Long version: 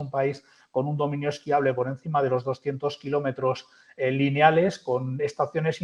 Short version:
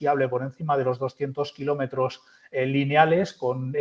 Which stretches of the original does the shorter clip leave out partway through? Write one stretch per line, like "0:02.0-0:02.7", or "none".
none